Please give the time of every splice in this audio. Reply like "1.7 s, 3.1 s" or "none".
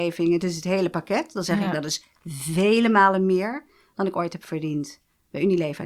none